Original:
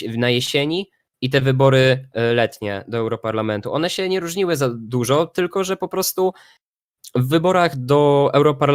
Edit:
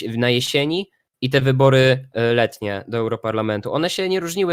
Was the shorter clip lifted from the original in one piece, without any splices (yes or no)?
yes